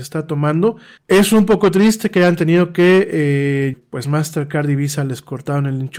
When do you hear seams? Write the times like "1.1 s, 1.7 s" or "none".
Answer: 1.0 s, 3.7 s